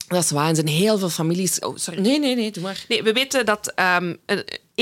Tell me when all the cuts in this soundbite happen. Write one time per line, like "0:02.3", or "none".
0:01.6